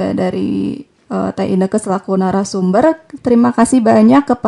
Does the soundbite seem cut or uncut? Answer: cut